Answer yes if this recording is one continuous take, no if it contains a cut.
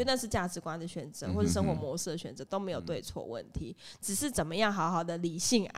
yes